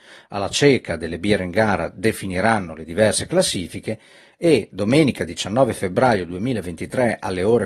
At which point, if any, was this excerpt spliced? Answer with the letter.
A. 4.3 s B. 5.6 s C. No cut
C